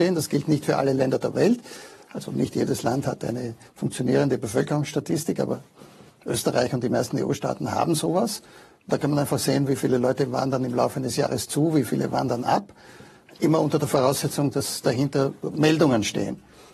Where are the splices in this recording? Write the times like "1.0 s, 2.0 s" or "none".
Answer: none